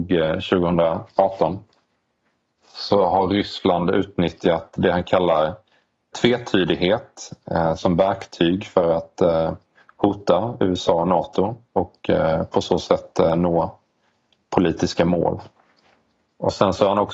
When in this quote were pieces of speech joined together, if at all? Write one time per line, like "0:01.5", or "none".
0:07.8